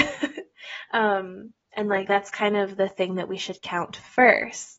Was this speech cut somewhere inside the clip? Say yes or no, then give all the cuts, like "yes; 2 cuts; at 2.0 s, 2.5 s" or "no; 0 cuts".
yes; 1 cut; at 1.6 s